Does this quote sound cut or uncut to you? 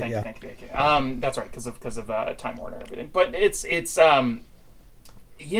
uncut